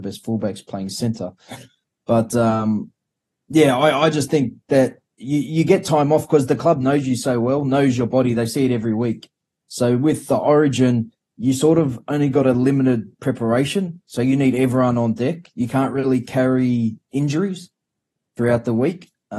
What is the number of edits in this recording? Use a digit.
0